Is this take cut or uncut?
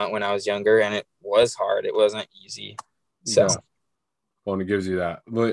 uncut